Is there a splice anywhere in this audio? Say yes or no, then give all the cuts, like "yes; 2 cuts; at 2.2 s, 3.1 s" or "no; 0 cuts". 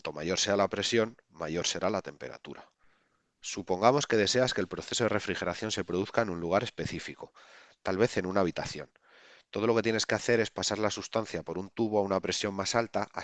no; 0 cuts